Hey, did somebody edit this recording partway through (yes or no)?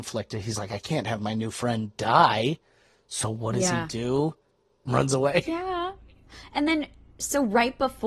yes